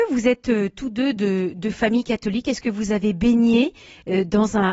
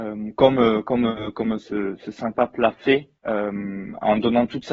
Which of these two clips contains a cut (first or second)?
second